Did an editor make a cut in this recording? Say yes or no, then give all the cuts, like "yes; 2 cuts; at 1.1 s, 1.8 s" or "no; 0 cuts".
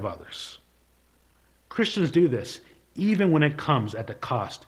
no; 0 cuts